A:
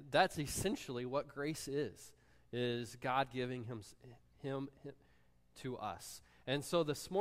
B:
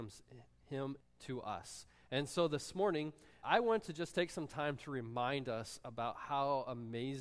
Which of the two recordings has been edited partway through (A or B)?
B